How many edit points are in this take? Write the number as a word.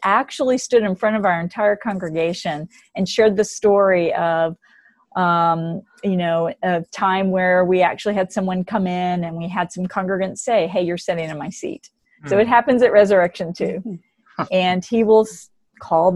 zero